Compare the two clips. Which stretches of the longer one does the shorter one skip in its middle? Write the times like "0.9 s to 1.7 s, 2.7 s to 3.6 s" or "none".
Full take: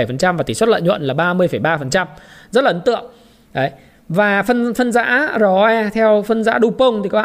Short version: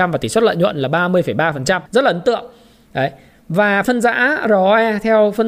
2.1 s to 2.5 s, 4.4 s to 4.8 s